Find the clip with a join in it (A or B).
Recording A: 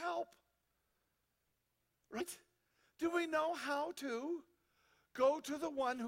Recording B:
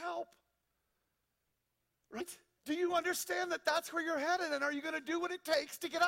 B